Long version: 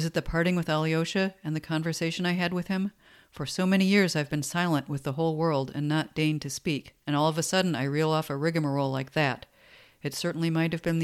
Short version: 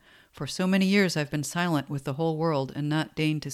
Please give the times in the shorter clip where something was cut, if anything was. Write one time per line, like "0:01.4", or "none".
none